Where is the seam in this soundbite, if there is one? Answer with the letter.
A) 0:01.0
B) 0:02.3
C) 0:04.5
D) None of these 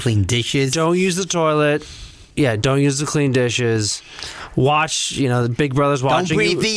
B